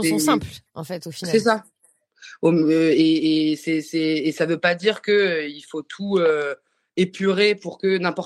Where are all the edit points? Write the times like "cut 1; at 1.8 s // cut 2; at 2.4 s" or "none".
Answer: none